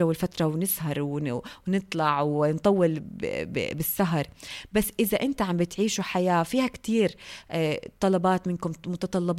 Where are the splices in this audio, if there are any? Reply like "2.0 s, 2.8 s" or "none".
none